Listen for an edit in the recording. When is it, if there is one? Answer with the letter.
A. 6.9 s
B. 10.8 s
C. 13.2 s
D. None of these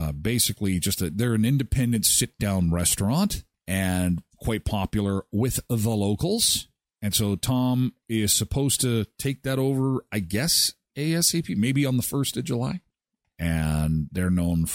C